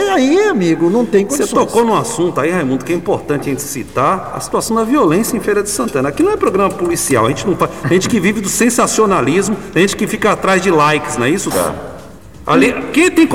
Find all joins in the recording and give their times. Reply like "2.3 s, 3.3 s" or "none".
11.5 s